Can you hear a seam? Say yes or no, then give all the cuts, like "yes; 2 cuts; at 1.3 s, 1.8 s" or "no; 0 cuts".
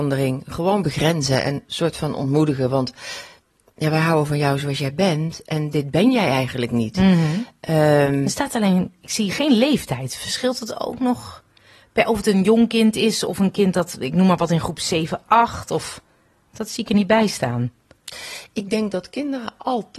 no; 0 cuts